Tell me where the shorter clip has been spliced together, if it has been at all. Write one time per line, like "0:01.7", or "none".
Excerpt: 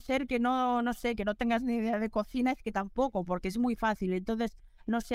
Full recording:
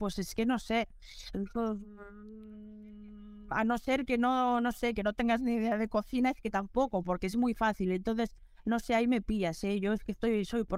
none